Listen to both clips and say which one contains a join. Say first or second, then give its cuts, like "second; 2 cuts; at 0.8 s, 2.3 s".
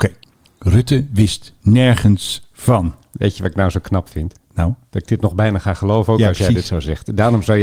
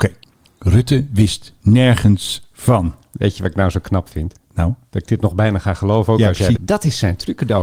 second; 1 cut; at 6.6 s